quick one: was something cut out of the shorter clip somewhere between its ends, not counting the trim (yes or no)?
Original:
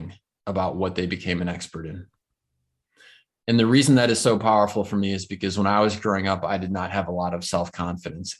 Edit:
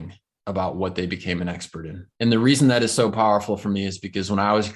yes